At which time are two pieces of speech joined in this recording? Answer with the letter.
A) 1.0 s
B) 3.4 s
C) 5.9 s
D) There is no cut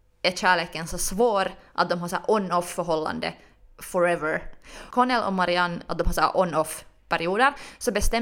C